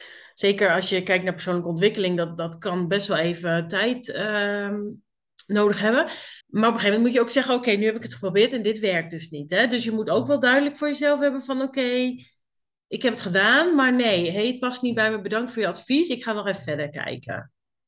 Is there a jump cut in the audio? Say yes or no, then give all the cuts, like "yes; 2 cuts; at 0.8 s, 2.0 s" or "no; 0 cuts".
yes; 1 cut; at 6.4 s